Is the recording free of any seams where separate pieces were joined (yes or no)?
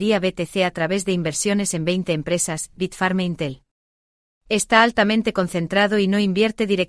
no